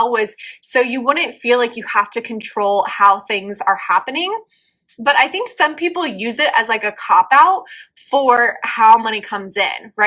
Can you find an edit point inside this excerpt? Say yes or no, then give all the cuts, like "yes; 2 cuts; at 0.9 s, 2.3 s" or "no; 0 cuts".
no; 0 cuts